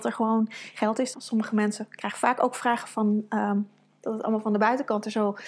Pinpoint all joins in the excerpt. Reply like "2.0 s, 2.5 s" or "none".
1.1 s